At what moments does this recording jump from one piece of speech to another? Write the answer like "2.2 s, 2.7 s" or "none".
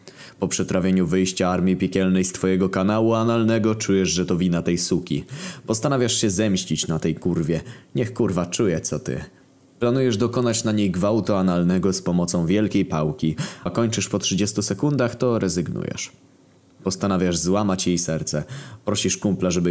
13.7 s